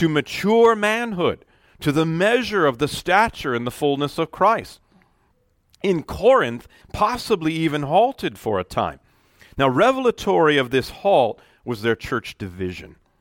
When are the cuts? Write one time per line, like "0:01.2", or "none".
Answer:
0:06.8